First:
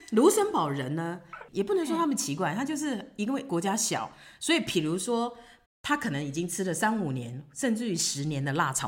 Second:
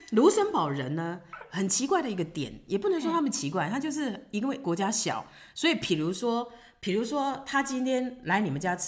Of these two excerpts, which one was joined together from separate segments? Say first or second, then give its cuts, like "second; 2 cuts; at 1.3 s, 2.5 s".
first; 2 cuts; at 1.5 s, 5.7 s